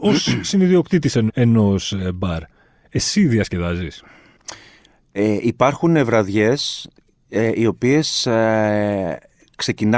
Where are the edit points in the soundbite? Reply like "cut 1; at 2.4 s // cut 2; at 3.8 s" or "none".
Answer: cut 1; at 1.3 s